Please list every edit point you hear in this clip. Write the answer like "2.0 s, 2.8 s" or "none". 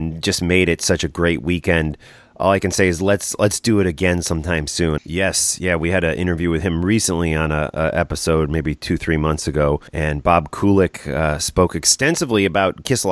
5.0 s, 9.9 s